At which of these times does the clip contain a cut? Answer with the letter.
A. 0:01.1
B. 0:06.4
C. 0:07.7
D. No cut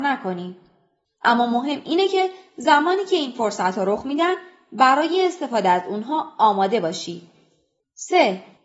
A